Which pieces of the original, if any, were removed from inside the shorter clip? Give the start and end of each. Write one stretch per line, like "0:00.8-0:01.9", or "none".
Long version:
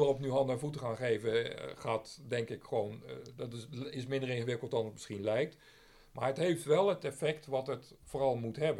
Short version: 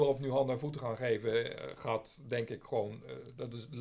none

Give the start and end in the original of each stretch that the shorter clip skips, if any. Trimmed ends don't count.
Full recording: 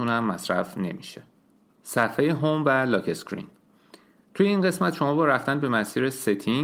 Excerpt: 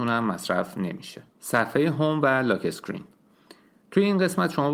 0:01.3-0:01.7

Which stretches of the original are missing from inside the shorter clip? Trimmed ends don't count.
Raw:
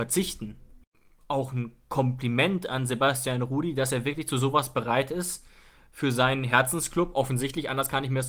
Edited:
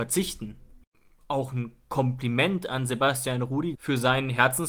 0:03.7-0:05.9

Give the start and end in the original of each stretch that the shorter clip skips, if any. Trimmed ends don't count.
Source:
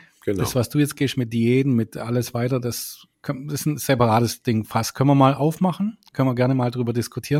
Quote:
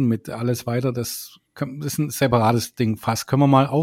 none

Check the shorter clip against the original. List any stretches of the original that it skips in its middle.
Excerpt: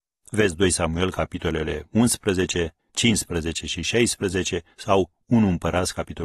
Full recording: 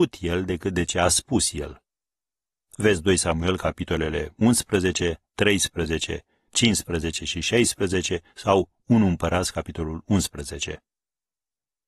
0:05.3-0:06.4

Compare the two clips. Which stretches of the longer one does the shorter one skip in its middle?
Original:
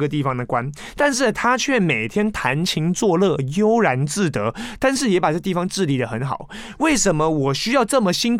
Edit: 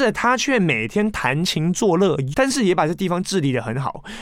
0:03.5-0:04.8

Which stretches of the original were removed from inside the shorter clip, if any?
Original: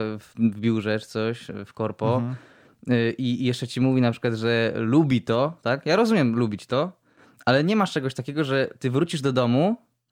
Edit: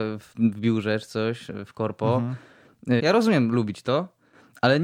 0:03.0-0:05.8

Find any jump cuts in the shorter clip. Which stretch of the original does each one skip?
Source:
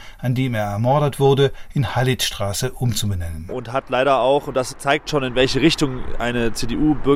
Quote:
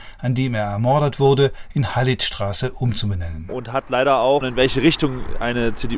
0:04.4-0:05.2

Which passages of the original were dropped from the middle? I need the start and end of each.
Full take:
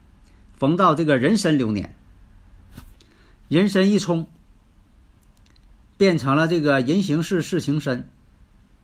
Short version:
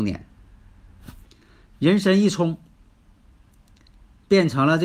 none

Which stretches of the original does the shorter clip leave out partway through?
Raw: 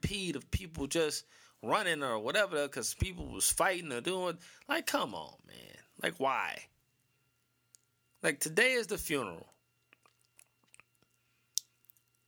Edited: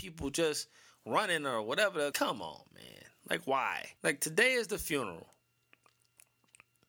0:02.7-0:04.8
0:06.7-0:08.2

